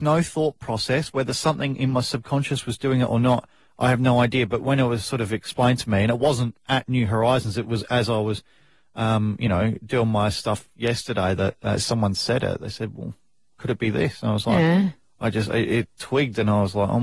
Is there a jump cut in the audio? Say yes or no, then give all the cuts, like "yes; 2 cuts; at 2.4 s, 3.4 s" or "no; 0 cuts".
no; 0 cuts